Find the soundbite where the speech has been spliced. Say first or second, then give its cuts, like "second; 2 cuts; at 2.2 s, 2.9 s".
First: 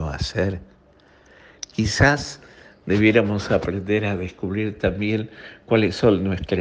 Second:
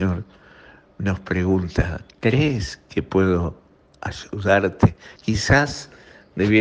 second; 1 cut; at 5.2 s